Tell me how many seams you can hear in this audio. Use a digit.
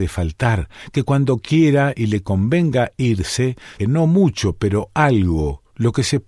1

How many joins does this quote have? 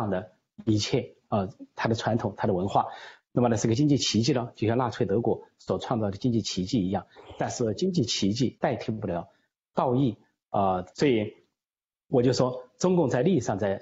3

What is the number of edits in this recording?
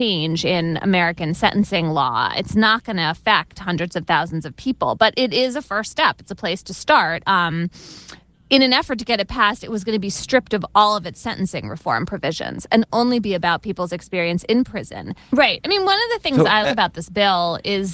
3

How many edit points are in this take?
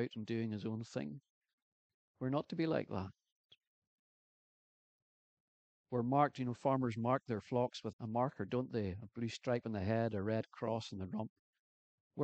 1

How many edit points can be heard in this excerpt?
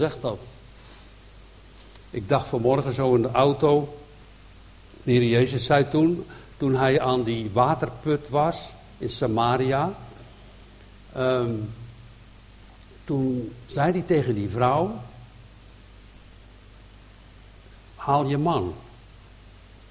0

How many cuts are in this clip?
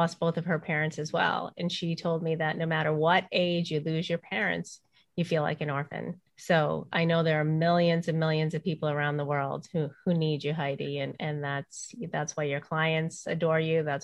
1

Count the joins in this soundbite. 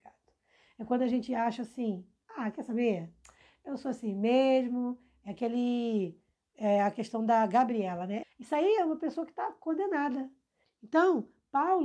2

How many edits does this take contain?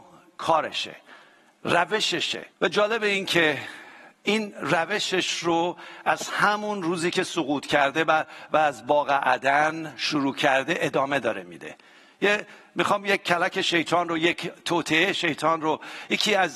1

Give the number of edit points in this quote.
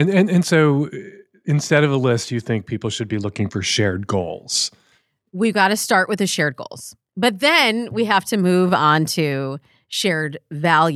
0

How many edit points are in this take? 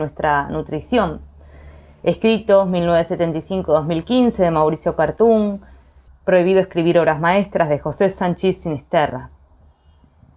1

